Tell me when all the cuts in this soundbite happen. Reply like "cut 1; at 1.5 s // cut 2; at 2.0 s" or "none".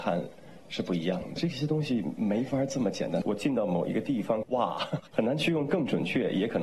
cut 1; at 4.4 s